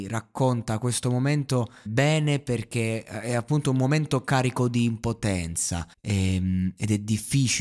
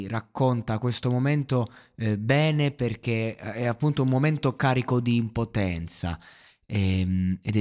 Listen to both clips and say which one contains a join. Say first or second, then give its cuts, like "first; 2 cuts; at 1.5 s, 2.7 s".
first; 2 cuts; at 1.9 s, 5.9 s